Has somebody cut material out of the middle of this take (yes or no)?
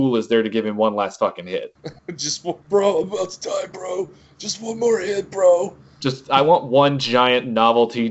no